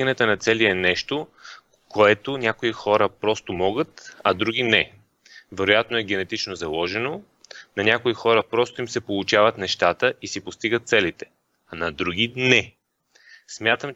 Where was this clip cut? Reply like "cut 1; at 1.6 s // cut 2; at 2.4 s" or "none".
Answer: none